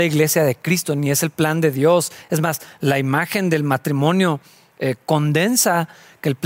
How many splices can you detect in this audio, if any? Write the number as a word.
zero